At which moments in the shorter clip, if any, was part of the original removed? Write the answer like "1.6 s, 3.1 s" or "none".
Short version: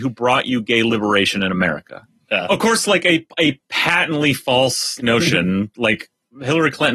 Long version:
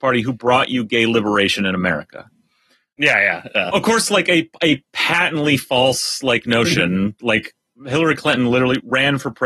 2.3 s, 5.0 s